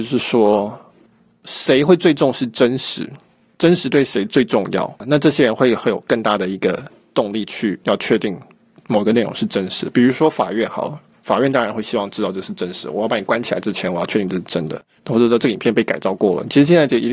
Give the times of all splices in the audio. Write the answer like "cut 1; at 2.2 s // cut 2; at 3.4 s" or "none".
cut 1; at 15.0 s